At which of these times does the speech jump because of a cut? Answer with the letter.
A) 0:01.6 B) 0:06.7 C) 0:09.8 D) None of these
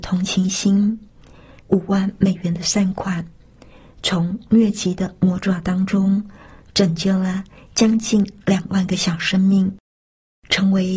A